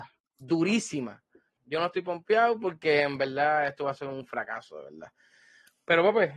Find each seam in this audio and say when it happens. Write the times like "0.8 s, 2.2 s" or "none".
1.6 s